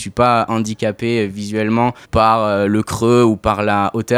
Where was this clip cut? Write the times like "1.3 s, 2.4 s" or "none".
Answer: 2.0 s